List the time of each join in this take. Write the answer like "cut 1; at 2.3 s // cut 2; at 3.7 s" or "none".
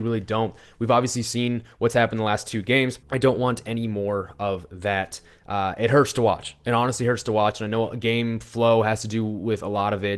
cut 1; at 3.0 s